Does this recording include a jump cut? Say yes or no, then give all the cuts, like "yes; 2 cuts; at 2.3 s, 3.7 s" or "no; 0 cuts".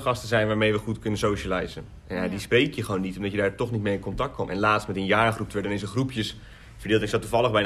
no; 0 cuts